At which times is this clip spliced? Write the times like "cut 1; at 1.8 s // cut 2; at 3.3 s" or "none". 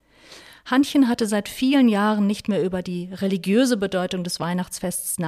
none